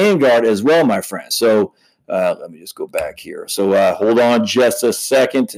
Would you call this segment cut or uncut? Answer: uncut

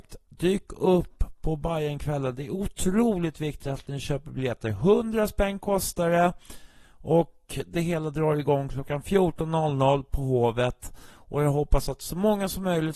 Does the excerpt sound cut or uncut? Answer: uncut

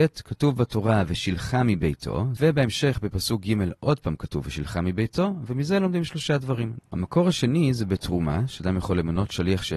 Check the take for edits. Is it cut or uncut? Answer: cut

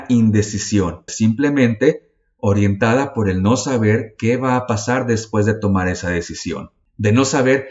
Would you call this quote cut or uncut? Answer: cut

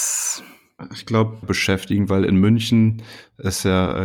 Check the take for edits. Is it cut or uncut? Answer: cut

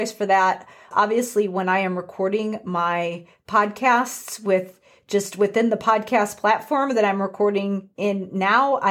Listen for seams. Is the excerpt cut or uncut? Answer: cut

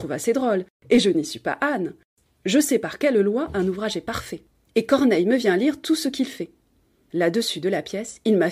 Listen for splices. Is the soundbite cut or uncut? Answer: uncut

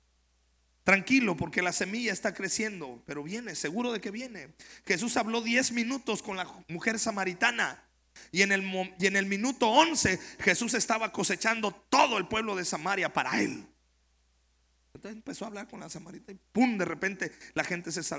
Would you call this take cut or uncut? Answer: uncut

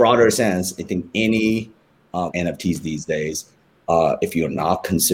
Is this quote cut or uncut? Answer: cut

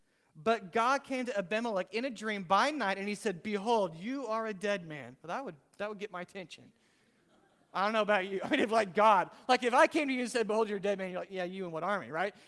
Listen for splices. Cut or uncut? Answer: uncut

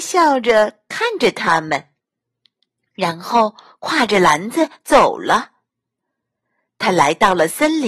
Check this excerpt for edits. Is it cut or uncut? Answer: uncut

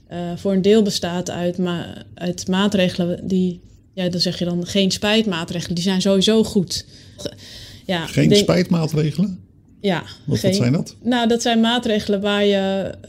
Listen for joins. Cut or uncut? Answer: cut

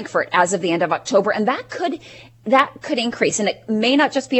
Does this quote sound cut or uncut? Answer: uncut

